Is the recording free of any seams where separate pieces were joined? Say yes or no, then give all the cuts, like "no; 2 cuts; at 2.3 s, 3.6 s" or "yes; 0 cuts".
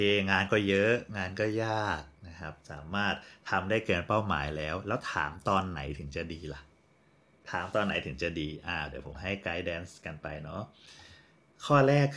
yes; 0 cuts